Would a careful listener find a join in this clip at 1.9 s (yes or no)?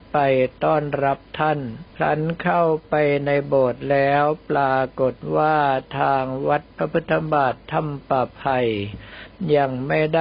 yes